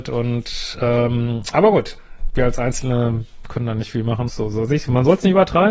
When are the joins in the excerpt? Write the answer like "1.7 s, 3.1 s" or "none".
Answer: 4.3 s